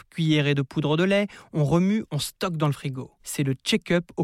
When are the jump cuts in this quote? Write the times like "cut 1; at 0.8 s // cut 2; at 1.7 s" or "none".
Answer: cut 1; at 3.2 s